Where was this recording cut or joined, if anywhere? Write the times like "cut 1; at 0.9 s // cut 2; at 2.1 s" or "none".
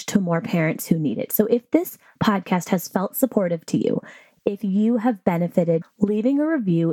cut 1; at 5.8 s